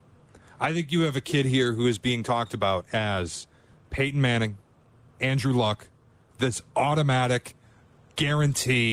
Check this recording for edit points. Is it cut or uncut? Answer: uncut